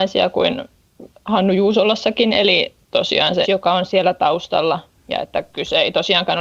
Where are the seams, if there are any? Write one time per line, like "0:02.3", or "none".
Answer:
0:03.4